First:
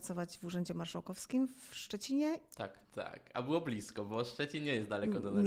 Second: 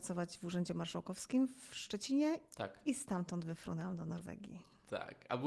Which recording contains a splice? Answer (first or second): first